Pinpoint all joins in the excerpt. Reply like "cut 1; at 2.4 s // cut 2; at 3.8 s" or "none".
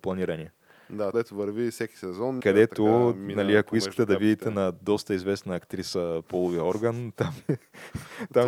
cut 1; at 1.1 s // cut 2; at 2.4 s